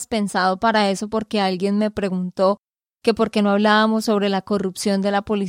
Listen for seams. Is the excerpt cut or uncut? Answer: uncut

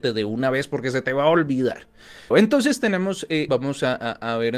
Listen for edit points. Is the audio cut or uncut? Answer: cut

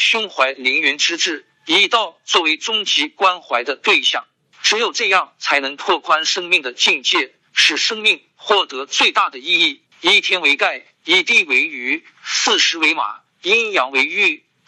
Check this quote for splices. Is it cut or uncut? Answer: cut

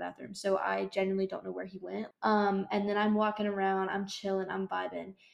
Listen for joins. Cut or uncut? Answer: cut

